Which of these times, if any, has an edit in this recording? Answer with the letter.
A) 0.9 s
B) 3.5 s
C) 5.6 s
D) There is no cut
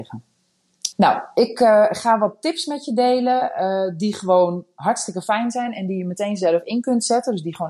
A